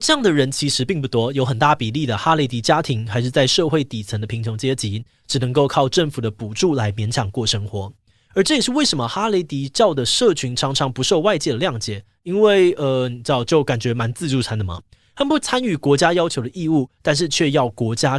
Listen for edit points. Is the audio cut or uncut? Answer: uncut